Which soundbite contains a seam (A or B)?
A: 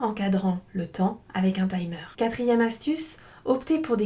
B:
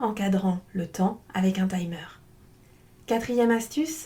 A